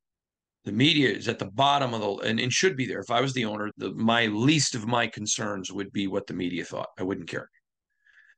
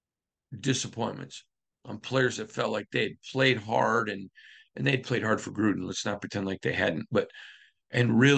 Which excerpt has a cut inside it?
first; 1 cut; at 3.7 s

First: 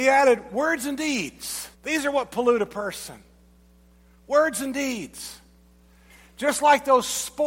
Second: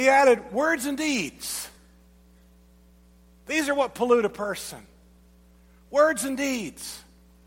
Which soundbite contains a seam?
first; 1 cut; at 1.7 s

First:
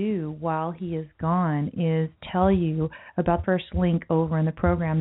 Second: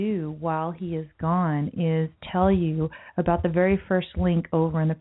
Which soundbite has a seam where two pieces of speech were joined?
first; 1 cut; at 3.4 s

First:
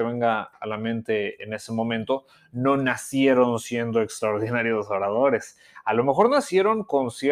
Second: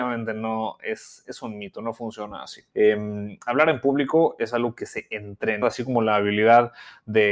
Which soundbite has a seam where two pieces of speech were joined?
second; 2 cuts; at 2.7 s, 5.6 s

